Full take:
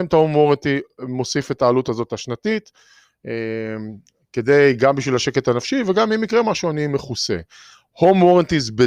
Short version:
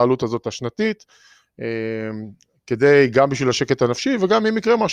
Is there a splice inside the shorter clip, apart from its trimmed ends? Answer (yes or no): no